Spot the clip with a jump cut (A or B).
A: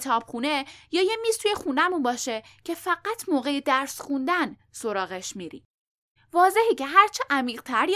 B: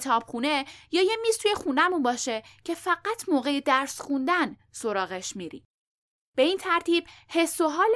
A